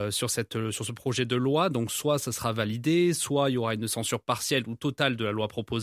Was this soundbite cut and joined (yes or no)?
no